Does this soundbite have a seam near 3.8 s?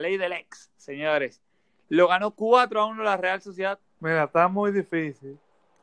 yes; 1 cut; at 3.8 s

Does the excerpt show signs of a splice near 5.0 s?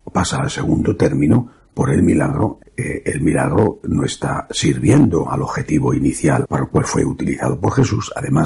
no; 2 cuts; at 2.6 s, 6.4 s

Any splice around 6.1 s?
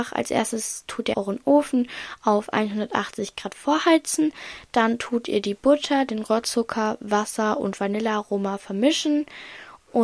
no; 1 cut; at 1.1 s

